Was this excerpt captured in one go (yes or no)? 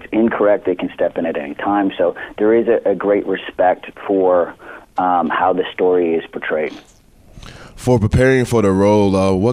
yes